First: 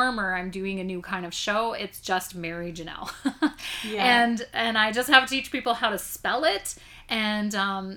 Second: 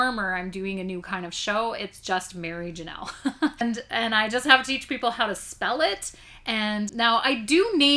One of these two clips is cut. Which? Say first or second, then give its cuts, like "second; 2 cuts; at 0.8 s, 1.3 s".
second; 2 cuts; at 3.6 s, 6.9 s